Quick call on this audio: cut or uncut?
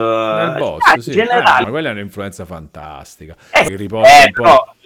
cut